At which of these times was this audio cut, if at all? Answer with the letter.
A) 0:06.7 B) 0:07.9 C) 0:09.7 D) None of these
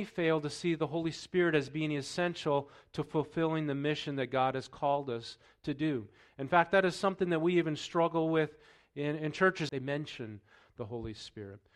C